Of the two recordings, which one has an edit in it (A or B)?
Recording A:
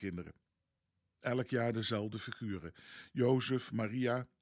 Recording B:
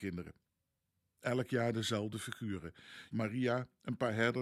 B